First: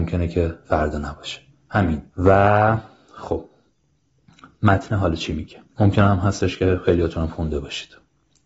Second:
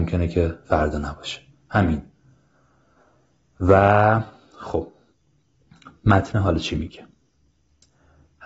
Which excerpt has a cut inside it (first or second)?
first